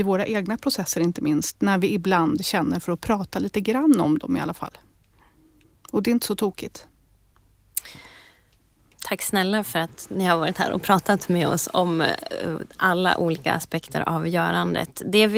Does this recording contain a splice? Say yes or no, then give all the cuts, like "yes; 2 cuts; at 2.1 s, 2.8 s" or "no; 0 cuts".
no; 0 cuts